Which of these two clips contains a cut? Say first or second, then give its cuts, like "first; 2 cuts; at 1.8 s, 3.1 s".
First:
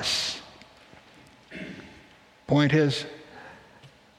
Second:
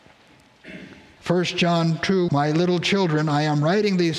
second; 2 cuts; at 1.2 s, 2.3 s